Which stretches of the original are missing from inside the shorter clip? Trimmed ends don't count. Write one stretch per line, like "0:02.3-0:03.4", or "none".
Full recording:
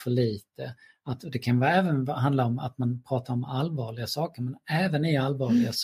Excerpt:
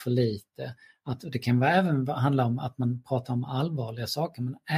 none